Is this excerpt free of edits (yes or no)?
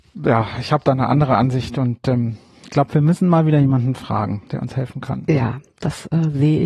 yes